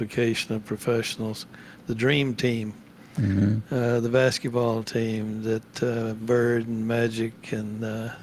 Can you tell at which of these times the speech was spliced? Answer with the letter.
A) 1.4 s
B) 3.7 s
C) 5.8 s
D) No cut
D